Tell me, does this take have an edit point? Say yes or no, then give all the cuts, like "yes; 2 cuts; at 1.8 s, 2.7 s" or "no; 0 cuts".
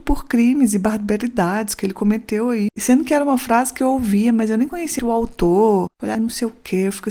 yes; 3 cuts; at 2.7 s, 5.0 s, 6.1 s